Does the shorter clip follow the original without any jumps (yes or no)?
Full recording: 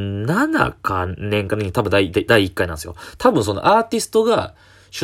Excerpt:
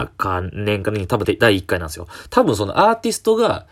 no